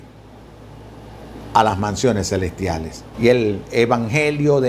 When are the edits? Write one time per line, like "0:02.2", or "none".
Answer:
0:03.1